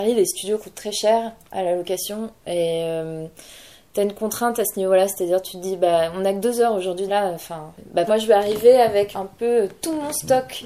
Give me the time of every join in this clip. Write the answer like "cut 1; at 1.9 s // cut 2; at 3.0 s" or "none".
cut 1; at 7.1 s // cut 2; at 8.1 s // cut 3; at 9.1 s